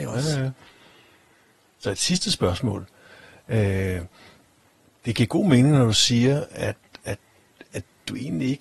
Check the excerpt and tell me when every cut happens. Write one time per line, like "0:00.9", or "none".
none